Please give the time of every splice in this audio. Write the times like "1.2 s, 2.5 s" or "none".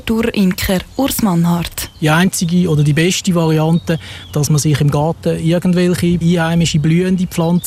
none